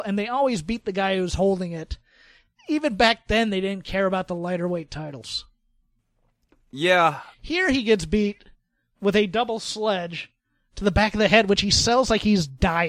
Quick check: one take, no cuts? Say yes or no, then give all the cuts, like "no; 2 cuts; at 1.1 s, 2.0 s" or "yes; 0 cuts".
yes; 0 cuts